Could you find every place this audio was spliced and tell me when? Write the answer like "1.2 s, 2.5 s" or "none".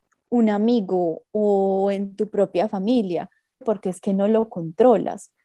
3.6 s

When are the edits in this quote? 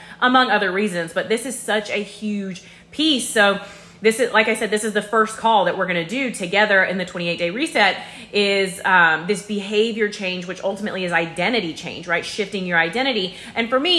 none

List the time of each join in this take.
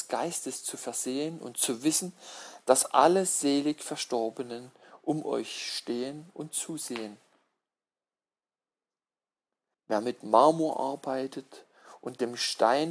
9.7 s

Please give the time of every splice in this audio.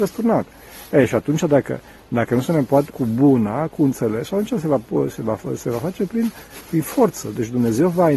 2.9 s

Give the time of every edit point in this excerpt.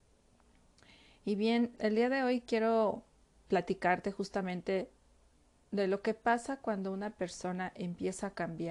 1.8 s

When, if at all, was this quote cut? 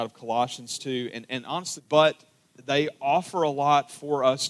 1.8 s

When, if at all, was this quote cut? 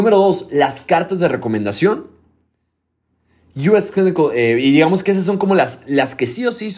none

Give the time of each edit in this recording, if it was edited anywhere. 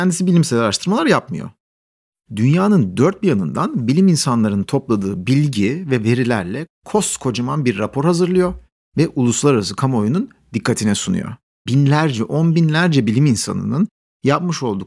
11.7 s

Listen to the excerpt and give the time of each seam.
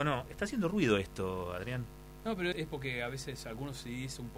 2.5 s

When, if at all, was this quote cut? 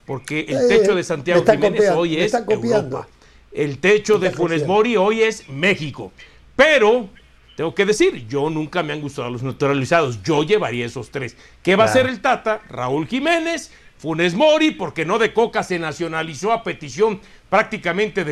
7.4 s

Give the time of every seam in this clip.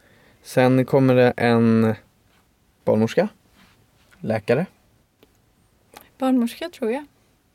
none

